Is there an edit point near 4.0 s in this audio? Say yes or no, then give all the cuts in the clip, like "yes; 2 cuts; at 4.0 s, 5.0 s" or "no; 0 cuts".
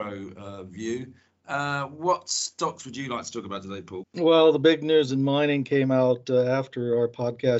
yes; 1 cut; at 4.0 s